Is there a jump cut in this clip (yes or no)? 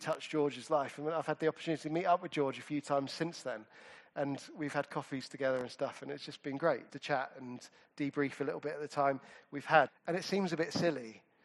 yes